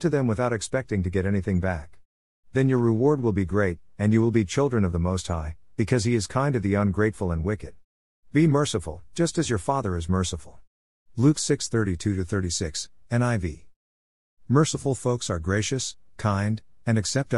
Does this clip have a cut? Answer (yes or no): no